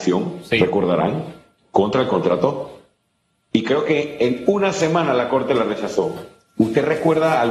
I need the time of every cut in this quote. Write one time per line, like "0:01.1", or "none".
none